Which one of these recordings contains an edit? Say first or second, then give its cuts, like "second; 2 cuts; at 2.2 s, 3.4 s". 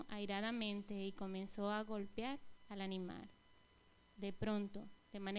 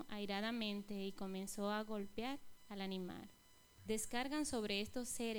second; 1 cut; at 3.8 s